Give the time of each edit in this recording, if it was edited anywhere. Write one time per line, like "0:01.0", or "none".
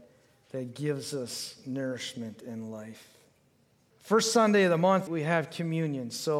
0:03.9
0:05.1